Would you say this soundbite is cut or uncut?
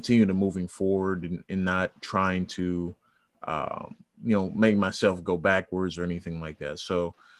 uncut